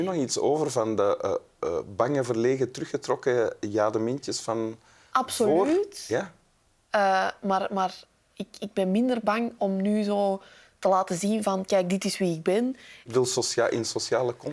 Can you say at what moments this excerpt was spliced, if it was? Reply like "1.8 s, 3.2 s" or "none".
9.6 s, 13.1 s